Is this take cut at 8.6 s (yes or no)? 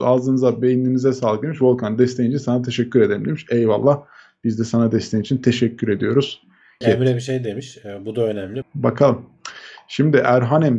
yes